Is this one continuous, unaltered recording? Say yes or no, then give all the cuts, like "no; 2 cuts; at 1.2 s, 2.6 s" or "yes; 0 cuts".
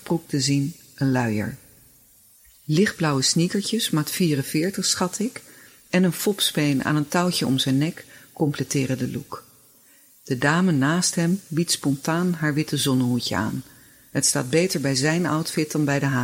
yes; 0 cuts